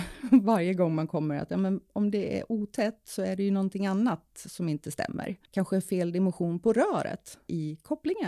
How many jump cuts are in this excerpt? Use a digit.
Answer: 1